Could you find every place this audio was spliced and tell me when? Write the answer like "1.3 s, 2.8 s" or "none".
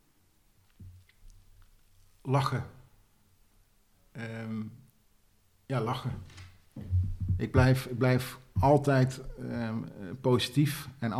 none